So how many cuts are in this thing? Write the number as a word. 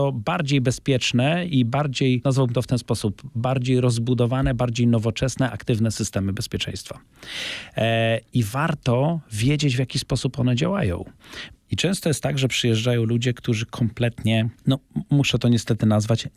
one